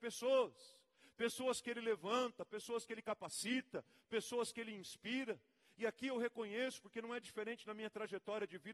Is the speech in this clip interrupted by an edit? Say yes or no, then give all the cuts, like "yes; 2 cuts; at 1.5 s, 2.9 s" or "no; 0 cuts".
no; 0 cuts